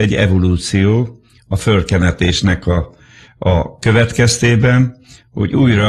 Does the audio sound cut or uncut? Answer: uncut